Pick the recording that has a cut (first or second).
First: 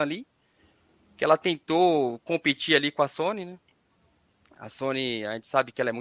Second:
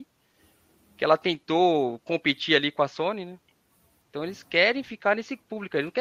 second